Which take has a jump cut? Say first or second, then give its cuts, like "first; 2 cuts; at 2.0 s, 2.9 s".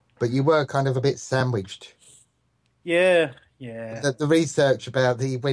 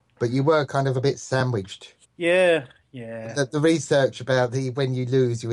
second; 1 cut; at 2.0 s